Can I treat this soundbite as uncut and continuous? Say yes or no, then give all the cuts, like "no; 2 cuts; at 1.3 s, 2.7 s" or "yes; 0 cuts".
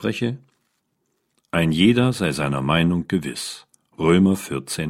no; 1 cut; at 1.3 s